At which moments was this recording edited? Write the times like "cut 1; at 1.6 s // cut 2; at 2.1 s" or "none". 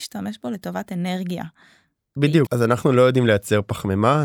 cut 1; at 2.5 s